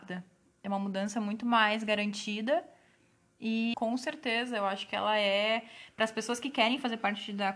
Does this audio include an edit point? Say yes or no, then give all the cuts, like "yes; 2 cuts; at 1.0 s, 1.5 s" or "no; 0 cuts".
yes; 1 cut; at 3.7 s